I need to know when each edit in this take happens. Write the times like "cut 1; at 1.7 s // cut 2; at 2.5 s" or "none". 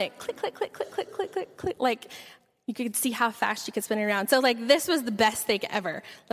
none